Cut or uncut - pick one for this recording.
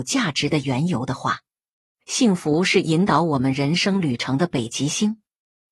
uncut